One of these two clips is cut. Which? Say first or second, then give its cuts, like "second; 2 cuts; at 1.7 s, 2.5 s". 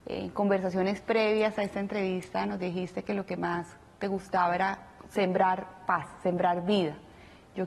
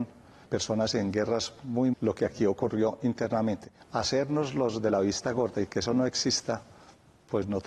second; 2 cuts; at 1.9 s, 3.8 s